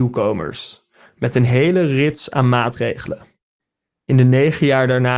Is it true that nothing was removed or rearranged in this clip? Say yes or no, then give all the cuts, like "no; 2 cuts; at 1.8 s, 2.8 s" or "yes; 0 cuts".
yes; 0 cuts